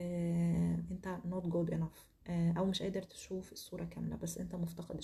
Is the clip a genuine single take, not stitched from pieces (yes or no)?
no